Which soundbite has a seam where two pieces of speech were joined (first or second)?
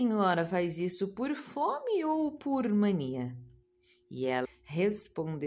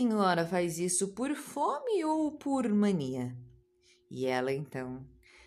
first